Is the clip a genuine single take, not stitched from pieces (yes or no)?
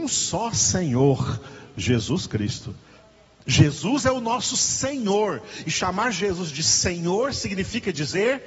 yes